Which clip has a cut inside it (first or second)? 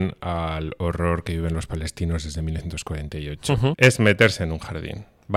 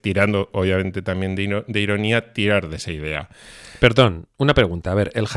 first